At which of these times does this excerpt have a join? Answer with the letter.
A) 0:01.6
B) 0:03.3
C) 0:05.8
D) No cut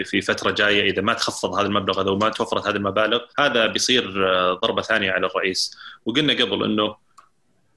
B